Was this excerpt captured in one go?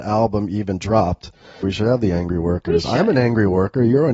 no; 1 cut; at 1.6 s

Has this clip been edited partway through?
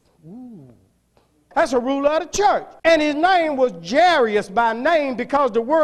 yes; 2 cuts; at 1.5 s, 2.8 s

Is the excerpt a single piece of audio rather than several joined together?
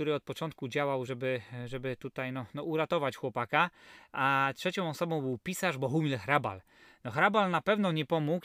yes; 0 cuts

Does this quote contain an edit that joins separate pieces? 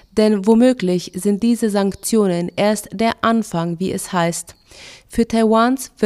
no; 0 cuts

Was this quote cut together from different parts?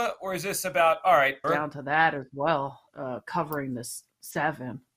yes; 2 cuts; at 1.4 s, 2.9 s

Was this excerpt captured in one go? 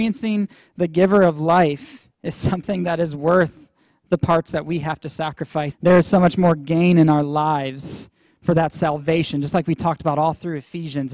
no; 2 cuts; at 2.1 s, 5.7 s

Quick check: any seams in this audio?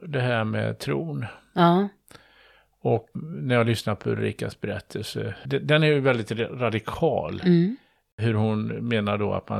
yes; 2 cuts; at 3.1 s, 5.4 s

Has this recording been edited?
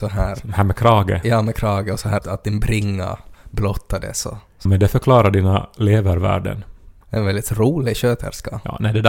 yes; 3 cuts; at 2.2 s, 4.7 s, 7.0 s

